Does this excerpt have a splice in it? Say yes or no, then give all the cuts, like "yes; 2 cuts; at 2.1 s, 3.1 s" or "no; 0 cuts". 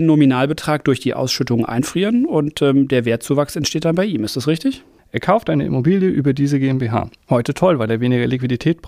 yes; 1 cut; at 5.0 s